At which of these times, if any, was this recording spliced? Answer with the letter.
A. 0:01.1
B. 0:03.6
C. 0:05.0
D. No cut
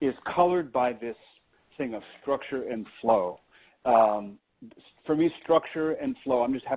D